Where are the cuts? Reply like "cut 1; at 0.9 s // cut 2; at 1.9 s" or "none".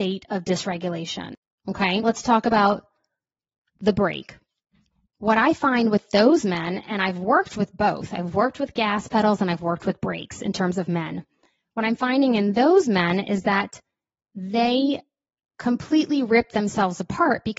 cut 1; at 2.0 s // cut 2; at 5.1 s

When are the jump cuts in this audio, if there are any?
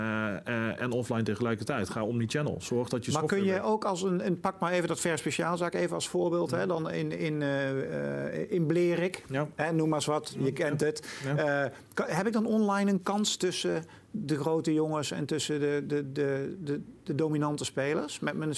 none

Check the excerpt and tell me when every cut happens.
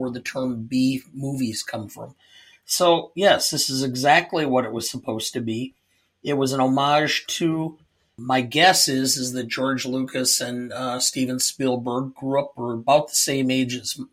none

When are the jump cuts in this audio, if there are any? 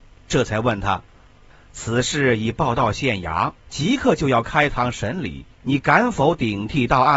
none

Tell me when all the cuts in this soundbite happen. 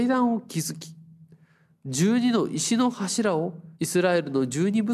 cut 1; at 3.8 s

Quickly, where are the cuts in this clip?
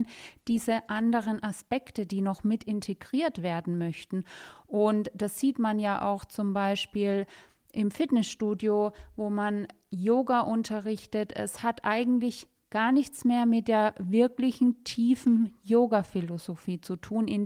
none

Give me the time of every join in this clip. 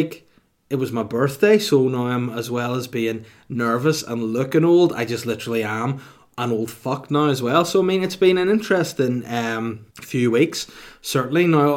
cut 1; at 9.9 s

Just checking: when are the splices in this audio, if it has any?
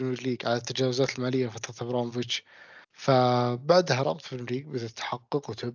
cut 1; at 2.8 s

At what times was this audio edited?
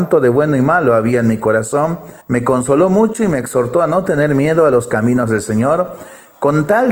cut 1; at 2.2 s

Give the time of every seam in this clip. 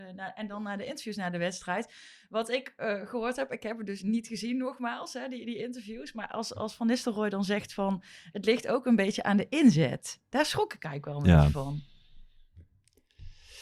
none

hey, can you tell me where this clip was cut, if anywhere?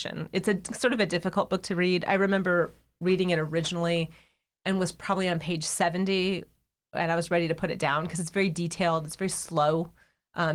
none

